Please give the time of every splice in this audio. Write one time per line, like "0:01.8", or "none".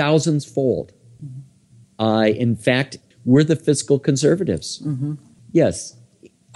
0:01.2
0:03.1
0:05.4